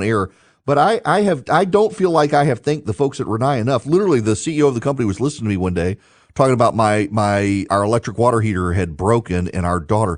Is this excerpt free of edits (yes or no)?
no